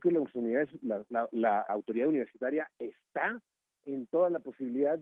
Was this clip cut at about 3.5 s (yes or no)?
no